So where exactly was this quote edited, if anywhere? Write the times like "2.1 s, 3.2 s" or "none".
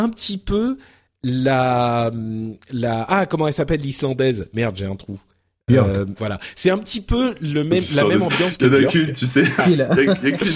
6.2 s, 9.6 s